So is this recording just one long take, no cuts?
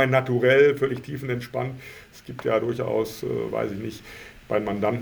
yes; 0 cuts

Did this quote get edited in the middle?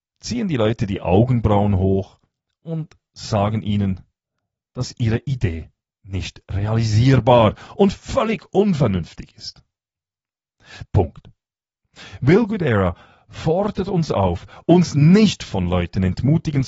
yes; 1 cut; at 10.8 s

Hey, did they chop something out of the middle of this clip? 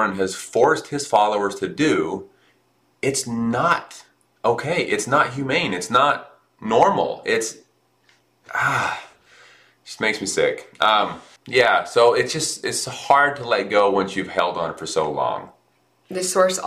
yes; 1 cut; at 11.4 s

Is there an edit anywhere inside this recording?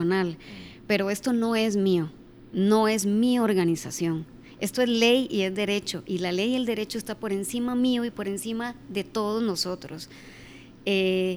no; 0 cuts

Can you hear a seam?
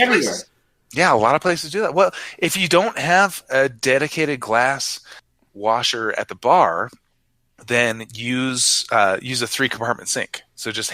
no; 0 cuts

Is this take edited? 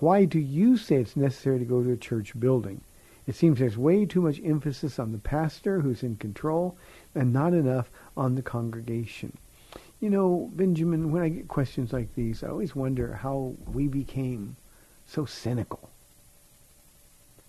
no; 0 cuts

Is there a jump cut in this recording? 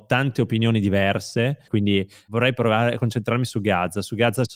yes; 1 cut; at 1.7 s

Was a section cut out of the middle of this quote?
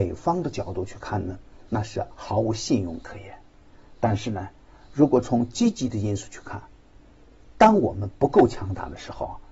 no; 0 cuts

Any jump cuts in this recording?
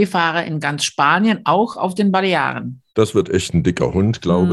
yes; 1 cut; at 2.9 s

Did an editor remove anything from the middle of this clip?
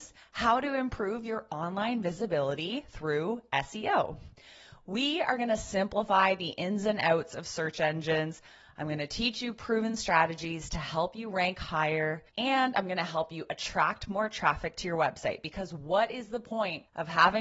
no; 0 cuts

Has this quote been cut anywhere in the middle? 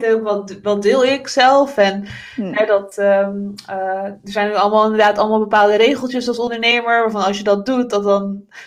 no; 0 cuts

